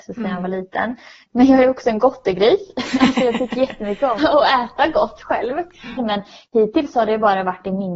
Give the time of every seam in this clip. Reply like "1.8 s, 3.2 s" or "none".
4.2 s, 6.0 s